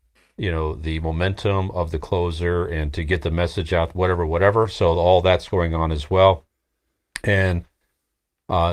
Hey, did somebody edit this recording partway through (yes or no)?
no